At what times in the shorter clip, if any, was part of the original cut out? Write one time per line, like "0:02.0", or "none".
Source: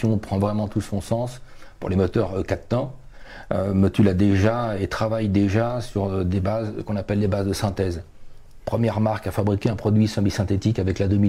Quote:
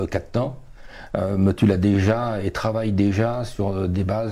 none